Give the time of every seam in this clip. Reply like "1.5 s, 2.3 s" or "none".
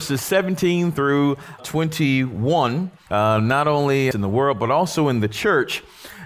1.6 s, 3.1 s, 4.1 s